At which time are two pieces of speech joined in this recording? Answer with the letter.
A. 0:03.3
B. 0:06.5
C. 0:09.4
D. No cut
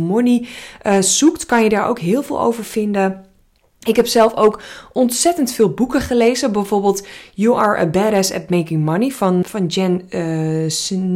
C